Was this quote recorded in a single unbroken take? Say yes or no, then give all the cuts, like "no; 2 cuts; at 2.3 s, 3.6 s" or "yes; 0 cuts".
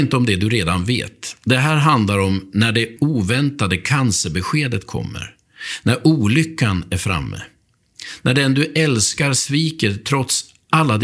no; 1 cut; at 3.0 s